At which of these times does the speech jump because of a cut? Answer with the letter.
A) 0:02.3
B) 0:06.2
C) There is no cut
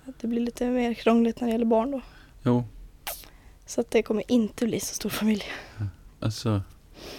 B